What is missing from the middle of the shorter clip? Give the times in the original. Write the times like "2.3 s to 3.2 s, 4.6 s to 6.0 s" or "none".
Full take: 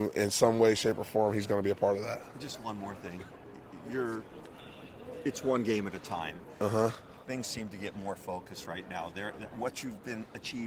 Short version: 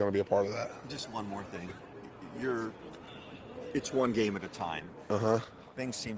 none